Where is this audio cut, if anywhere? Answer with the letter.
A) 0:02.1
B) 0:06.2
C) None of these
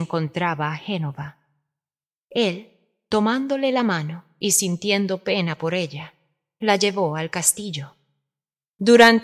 A